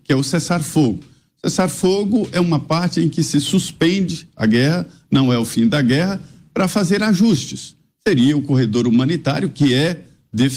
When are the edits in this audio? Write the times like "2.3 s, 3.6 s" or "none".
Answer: none